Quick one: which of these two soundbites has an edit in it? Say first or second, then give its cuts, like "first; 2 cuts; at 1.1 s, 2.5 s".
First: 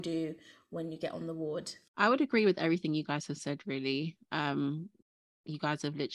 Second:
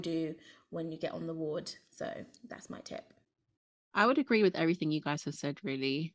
first; 1 cut; at 1.9 s